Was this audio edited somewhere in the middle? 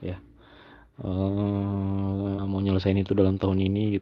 yes; 1 cut; at 2.4 s

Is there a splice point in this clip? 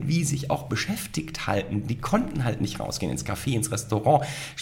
no; 0 cuts

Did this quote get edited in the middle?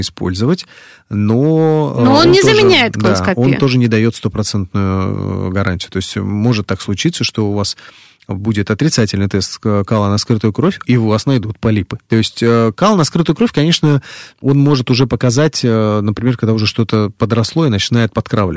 yes; 2 cuts; at 10.8 s, 12.1 s

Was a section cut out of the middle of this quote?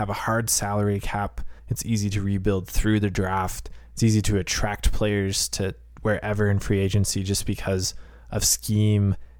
yes; 1 cut; at 1.6 s

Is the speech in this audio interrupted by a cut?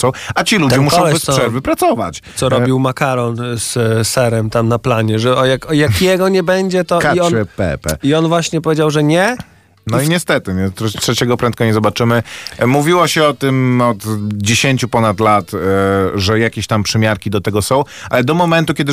no; 0 cuts

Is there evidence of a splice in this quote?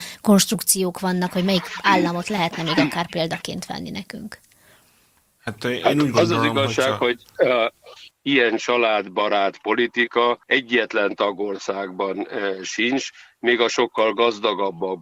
yes; 2 cuts; at 8.1 s, 10.4 s

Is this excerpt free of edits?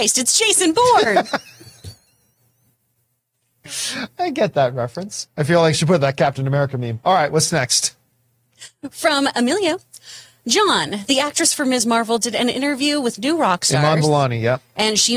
yes; 0 cuts

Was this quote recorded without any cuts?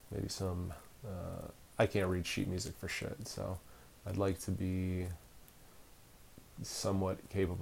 yes; 0 cuts

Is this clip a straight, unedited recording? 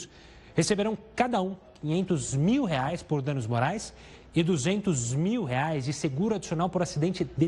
yes; 0 cuts

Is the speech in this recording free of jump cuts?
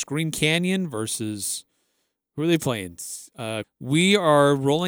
no; 1 cut; at 3.6 s

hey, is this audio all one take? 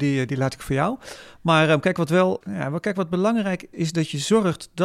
no; 2 cuts; at 2.4 s, 3.7 s

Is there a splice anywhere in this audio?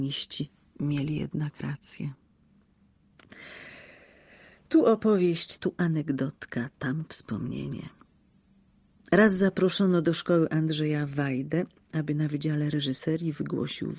yes; 1 cut; at 5.6 s

